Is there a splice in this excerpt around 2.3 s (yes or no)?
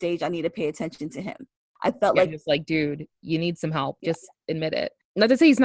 yes